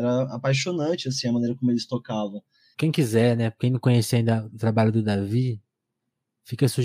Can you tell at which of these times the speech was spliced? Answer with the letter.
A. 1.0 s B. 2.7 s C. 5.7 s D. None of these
B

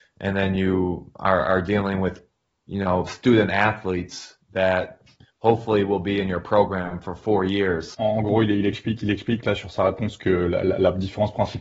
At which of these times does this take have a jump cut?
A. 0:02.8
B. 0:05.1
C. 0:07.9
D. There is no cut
C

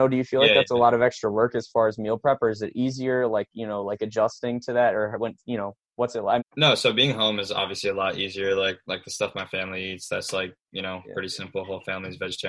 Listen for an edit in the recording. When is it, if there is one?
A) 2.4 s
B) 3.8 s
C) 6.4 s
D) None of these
C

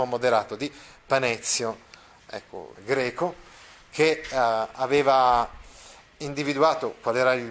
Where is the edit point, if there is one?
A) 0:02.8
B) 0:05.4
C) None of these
A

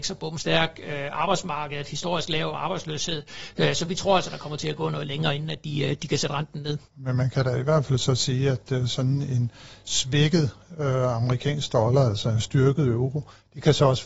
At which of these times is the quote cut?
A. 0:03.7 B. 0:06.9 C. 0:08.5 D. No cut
B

